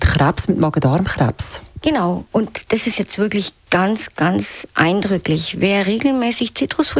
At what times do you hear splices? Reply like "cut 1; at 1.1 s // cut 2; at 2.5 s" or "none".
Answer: none